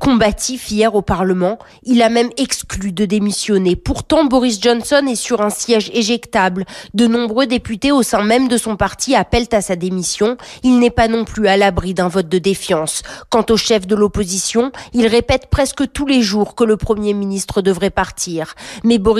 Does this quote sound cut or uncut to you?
uncut